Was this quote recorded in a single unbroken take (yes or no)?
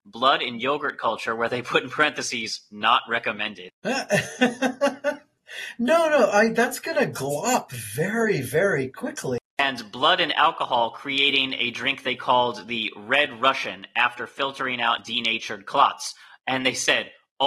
yes